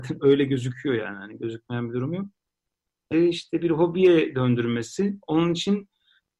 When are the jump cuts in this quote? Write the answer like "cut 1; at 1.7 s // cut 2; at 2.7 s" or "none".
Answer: cut 1; at 3.1 s